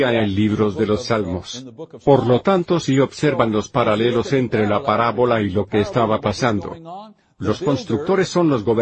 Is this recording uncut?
yes; 0 cuts

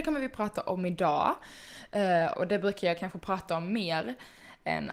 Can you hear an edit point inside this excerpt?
yes; 1 cut; at 2.3 s

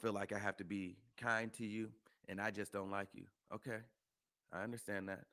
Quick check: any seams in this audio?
yes; 1 cut; at 3.4 s

